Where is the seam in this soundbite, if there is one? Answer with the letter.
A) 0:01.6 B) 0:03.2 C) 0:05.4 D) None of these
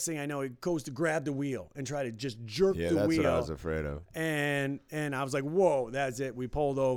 D